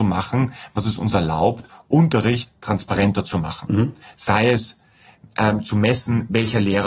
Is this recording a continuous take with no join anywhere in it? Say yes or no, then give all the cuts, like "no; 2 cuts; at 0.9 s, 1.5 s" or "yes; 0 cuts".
yes; 0 cuts